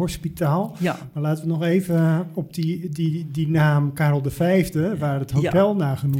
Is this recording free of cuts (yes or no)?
yes